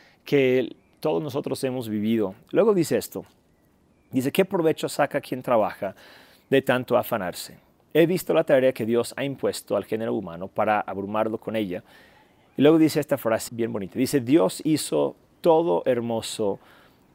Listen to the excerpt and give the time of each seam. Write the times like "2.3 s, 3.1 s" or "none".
13.5 s

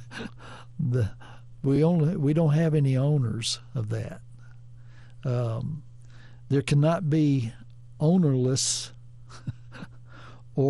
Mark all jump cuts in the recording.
none

